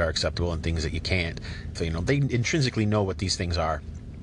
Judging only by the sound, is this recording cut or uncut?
cut